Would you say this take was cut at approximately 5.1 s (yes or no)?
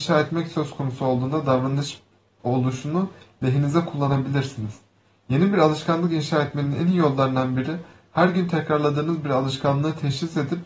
no